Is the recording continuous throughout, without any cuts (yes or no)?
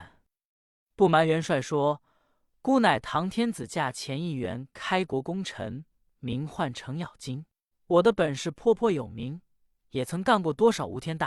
no